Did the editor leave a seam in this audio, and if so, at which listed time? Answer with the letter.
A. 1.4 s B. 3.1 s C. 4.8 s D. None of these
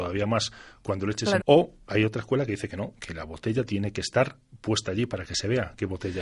A